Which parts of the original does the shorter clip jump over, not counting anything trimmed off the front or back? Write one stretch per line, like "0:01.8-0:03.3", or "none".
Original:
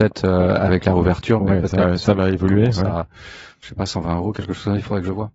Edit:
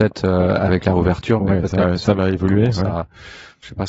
none